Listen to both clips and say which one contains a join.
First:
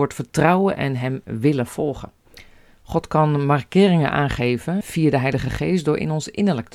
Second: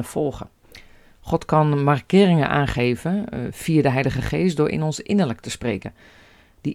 first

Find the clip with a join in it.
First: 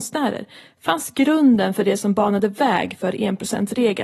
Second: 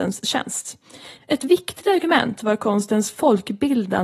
second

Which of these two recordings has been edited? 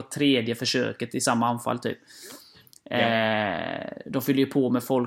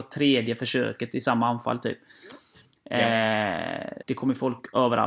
second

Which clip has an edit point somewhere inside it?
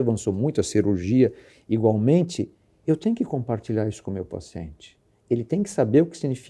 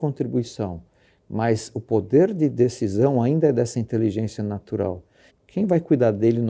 second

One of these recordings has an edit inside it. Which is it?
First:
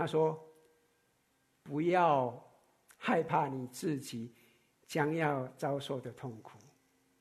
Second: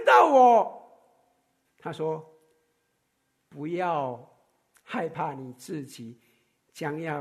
second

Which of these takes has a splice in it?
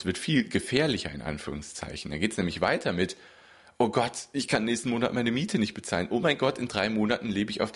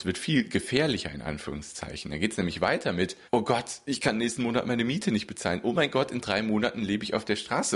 second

